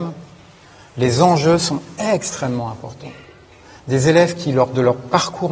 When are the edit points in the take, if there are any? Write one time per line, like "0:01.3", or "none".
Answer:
none